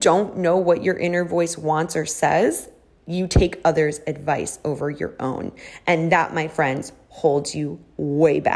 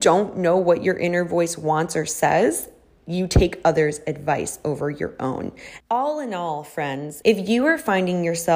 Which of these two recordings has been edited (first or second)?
second